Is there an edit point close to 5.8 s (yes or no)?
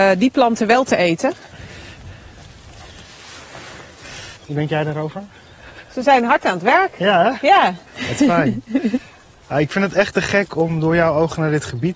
no